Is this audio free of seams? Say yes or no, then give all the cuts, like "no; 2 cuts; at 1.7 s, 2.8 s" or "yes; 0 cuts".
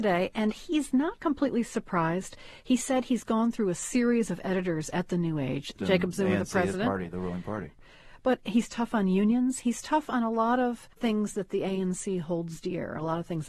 no; 1 cut; at 5.8 s